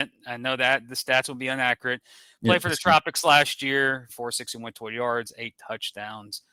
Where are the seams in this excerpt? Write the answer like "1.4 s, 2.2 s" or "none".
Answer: 4.1 s